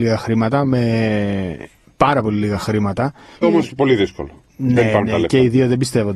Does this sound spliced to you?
yes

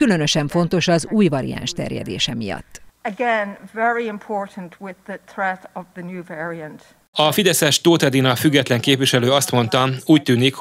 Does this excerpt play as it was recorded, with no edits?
no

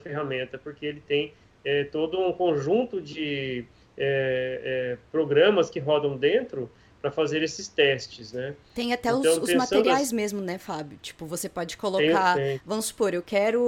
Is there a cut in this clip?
no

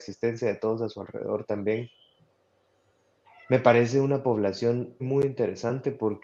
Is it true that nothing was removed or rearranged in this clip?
no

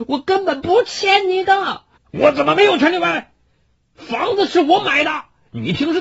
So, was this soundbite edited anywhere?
yes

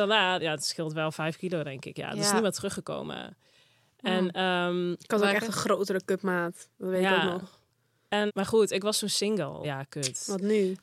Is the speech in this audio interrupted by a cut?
yes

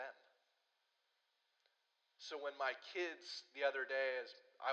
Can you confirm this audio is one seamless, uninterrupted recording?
yes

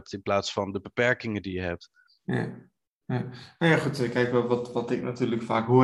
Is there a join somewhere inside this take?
no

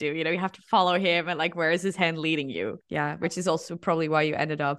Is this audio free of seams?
yes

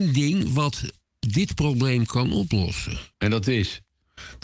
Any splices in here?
yes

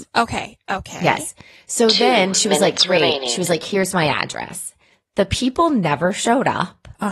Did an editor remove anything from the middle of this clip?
no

